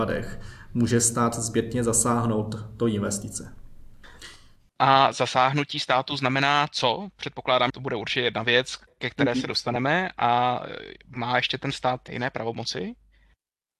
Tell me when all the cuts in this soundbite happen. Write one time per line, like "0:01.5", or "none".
0:07.7
0:12.1